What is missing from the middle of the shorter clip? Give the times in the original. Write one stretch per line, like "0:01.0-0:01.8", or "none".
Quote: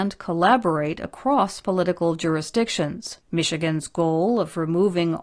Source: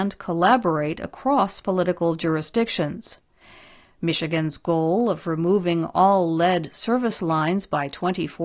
0:03.2-0:03.9